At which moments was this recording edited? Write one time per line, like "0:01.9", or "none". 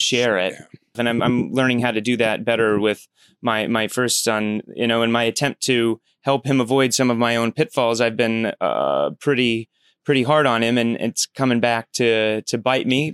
0:00.9